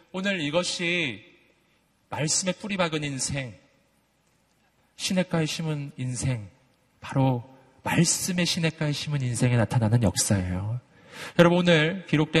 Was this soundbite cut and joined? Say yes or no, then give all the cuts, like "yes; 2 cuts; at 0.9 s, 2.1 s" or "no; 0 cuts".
no; 0 cuts